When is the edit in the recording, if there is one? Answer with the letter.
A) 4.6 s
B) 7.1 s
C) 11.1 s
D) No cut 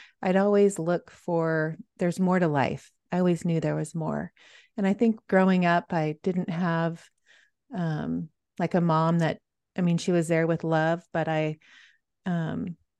D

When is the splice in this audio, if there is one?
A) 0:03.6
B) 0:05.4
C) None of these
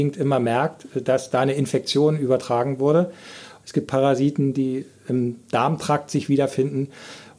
A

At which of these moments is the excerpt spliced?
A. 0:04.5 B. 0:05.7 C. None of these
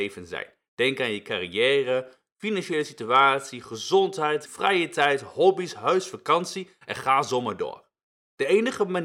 A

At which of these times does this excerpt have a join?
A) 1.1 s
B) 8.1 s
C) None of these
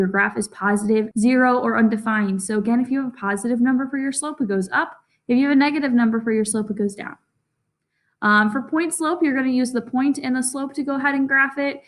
A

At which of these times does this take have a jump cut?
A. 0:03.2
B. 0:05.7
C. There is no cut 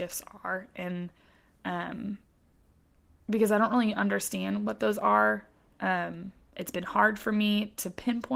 C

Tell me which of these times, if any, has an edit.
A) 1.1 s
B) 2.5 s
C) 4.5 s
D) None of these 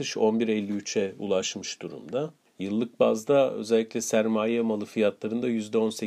B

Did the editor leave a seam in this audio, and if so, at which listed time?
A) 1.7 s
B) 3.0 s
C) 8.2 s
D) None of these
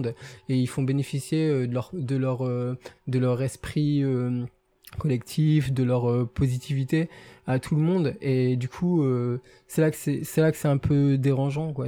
D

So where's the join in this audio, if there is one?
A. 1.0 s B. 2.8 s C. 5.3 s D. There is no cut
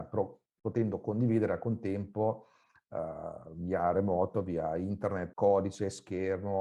C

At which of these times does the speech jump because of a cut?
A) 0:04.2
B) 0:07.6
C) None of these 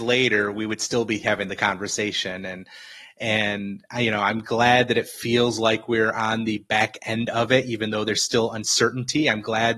C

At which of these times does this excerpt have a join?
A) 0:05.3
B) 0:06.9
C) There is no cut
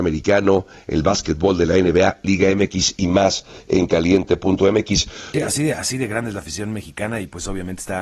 A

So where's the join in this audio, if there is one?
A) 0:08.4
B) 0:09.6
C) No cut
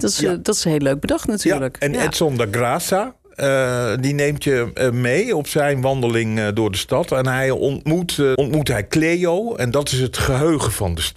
A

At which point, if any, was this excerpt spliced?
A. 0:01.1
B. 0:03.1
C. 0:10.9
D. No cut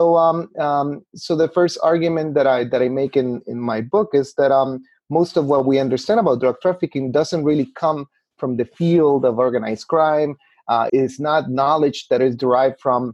C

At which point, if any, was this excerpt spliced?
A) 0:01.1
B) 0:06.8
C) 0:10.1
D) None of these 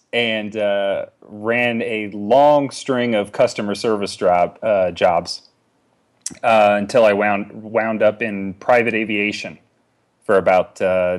D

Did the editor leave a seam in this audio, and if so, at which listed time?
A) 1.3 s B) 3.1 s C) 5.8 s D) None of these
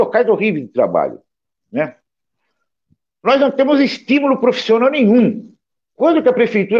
C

